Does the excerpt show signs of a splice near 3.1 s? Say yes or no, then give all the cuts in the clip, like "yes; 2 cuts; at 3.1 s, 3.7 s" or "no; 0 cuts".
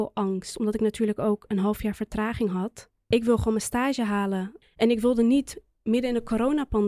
yes; 1 cut; at 3.1 s